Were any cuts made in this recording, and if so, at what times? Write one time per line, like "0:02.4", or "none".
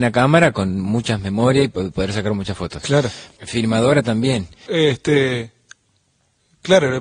0:03.4
0:04.7

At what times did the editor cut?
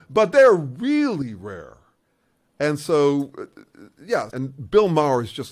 0:04.3

